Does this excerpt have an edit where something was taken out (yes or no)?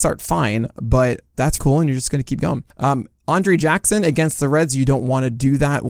yes